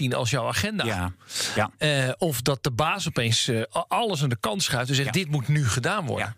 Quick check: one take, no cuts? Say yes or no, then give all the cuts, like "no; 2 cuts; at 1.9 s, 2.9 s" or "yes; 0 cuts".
yes; 0 cuts